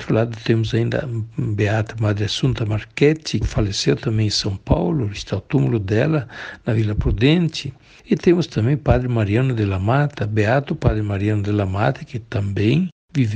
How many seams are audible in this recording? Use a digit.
1